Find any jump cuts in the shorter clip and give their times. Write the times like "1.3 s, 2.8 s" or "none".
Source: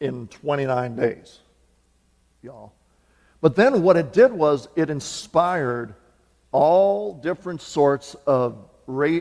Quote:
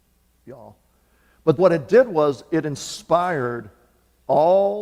1.6 s